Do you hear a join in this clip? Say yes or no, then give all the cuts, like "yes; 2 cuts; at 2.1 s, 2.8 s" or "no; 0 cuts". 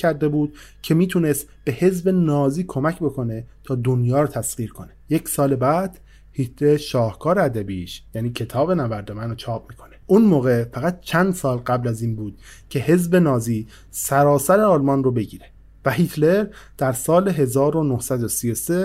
yes; 2 cuts; at 5.0 s, 10.0 s